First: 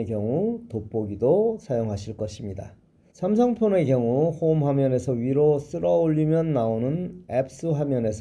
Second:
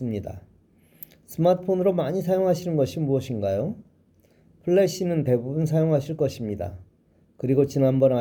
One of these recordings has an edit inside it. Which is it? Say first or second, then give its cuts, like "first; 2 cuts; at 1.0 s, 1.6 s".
first; 1 cut; at 3.1 s